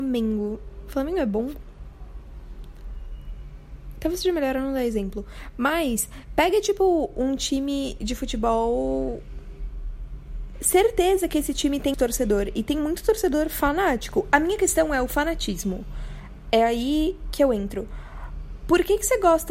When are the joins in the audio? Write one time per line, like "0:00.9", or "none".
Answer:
0:10.5
0:11.9